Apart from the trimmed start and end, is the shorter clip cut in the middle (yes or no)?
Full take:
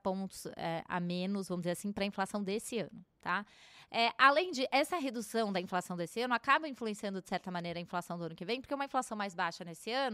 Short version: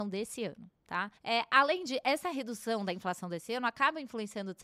yes